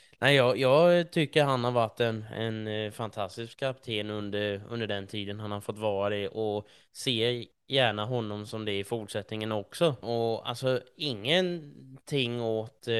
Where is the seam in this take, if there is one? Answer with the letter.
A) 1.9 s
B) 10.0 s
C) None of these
B